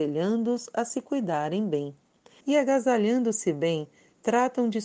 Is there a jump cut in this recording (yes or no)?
yes